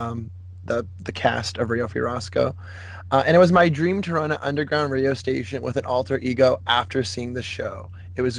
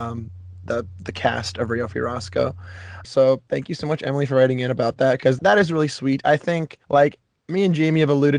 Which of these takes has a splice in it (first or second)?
second